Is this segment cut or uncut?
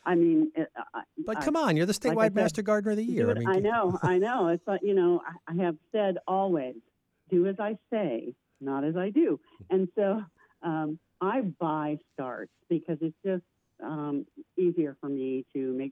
uncut